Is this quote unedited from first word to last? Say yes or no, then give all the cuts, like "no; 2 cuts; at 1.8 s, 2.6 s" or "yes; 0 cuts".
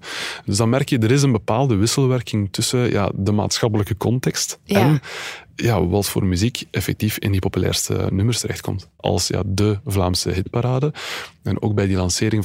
no; 1 cut; at 9.0 s